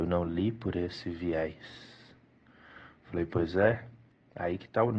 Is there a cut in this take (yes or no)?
no